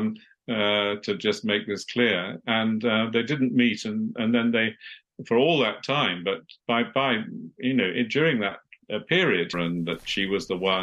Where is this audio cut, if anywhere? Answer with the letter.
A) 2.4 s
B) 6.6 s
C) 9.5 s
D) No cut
C